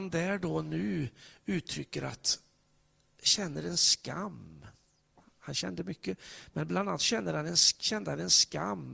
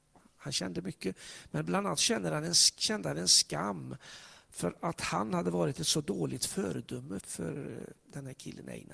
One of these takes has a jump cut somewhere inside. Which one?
second; 1 cut; at 7.2 s

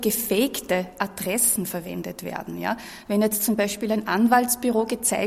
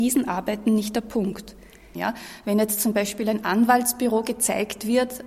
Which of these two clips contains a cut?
second; 1 cut; at 1.9 s

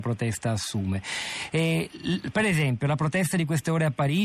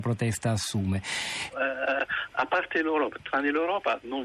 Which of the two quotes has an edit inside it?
second; 1 cut; at 1.5 s

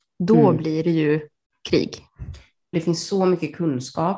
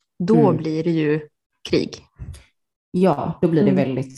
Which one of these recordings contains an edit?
first; 1 cut; at 2.7 s

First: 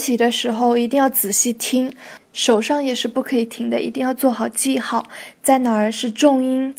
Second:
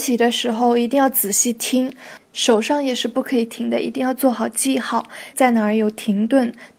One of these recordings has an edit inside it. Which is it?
second; 1 cut; at 5.3 s

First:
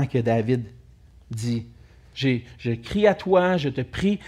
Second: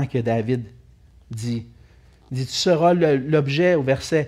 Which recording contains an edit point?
first; 1 cut; at 2.1 s

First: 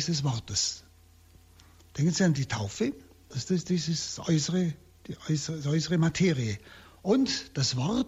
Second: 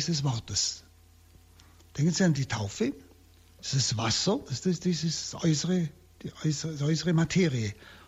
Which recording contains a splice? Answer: first; 1 cut; at 3.3 s

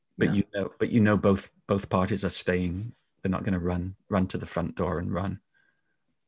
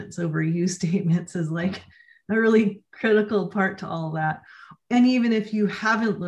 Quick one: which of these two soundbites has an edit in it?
second; 1 cut; at 4.8 s

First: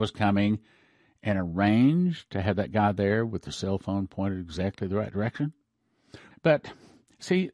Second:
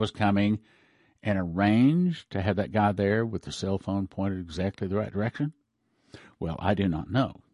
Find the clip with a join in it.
first; 1 cut; at 6.3 s

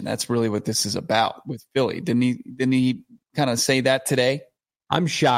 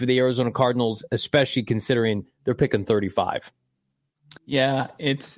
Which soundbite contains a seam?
second; 1 cut; at 4.4 s

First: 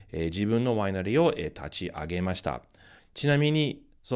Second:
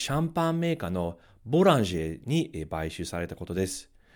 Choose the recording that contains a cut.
first; 1 cut; at 3.0 s

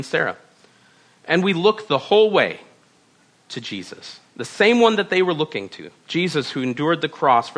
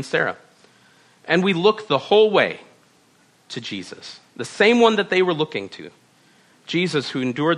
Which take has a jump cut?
first; 1 cut; at 6.0 s

